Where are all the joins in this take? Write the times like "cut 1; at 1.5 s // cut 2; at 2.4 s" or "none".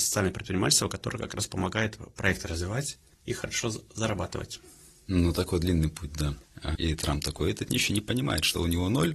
cut 1; at 6.7 s